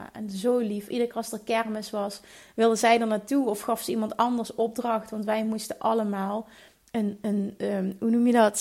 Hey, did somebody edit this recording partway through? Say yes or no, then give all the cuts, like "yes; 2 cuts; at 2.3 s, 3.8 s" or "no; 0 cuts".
no; 0 cuts